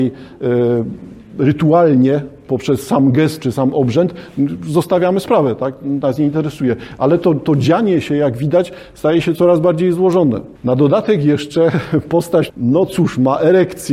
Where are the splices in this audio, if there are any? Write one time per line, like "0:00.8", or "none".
0:10.6
0:12.5